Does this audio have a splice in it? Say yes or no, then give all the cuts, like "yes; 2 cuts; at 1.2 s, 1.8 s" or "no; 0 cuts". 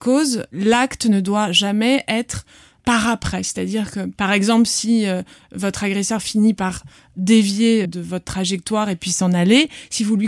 yes; 2 cuts; at 4.2 s, 7.8 s